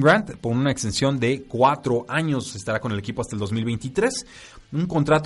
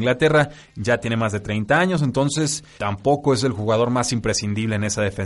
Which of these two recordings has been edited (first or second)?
second